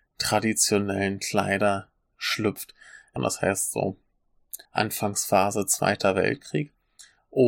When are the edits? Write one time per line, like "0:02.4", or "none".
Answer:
0:03.2
0:04.6